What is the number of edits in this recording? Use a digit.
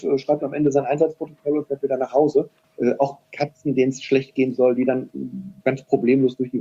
1